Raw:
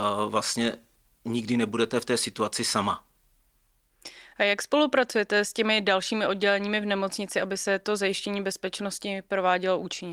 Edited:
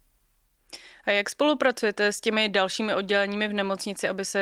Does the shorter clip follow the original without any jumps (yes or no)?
yes